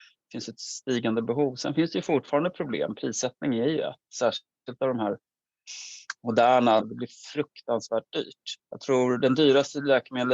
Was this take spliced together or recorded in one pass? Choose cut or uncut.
cut